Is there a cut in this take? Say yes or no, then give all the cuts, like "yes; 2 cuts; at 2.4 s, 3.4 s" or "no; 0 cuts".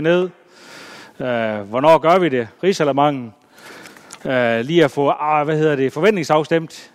yes; 2 cuts; at 2.6 s, 4.2 s